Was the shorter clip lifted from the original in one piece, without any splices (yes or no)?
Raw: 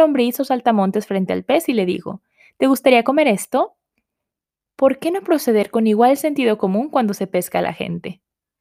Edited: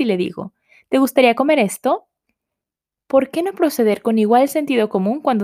yes